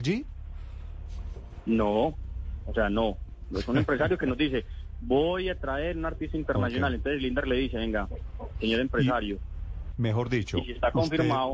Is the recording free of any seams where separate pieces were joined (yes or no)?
no